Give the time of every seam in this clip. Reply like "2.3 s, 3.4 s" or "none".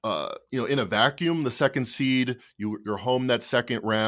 none